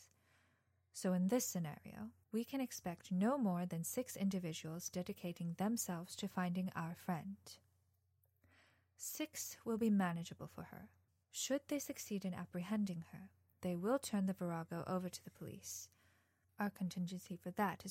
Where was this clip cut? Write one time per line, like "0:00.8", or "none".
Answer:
none